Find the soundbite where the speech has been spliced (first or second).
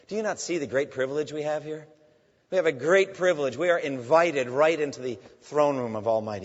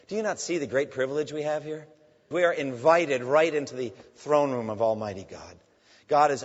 second